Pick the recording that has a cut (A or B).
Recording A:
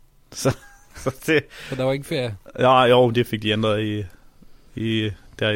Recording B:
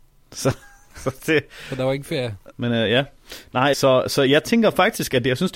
B